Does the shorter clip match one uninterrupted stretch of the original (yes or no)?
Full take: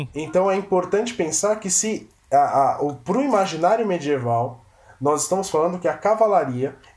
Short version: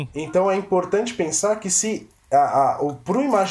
yes